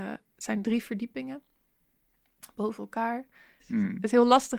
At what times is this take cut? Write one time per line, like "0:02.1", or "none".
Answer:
0:03.6